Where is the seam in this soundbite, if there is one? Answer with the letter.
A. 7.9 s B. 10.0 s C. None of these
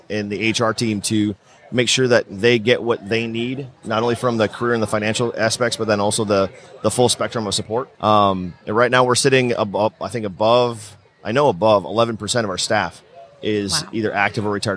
A